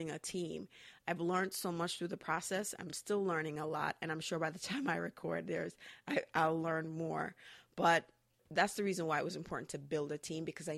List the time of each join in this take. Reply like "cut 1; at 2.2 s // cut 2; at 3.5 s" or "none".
none